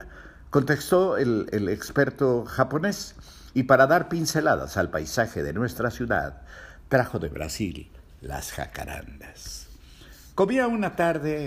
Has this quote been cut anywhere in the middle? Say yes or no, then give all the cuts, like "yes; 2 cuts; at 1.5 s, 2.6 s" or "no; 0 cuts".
no; 0 cuts